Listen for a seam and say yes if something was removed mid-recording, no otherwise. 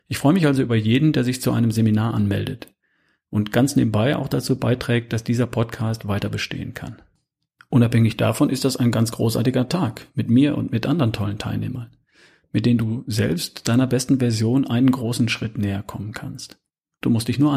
no